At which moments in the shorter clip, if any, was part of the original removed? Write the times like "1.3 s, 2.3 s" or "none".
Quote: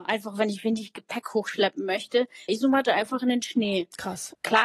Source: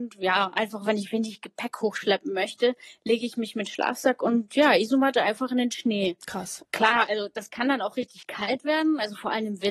2.5 s